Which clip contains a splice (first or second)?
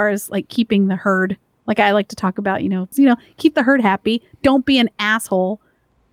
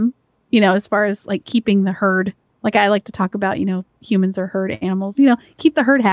first